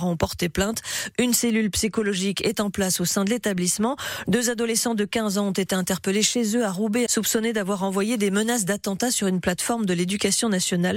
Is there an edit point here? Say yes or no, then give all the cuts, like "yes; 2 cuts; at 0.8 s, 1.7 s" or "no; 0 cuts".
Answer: yes; 2 cuts; at 4.2 s, 7.1 s